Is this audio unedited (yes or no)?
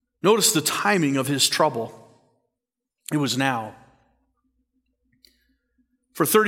yes